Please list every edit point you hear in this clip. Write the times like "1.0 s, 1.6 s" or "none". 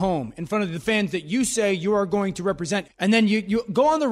2.8 s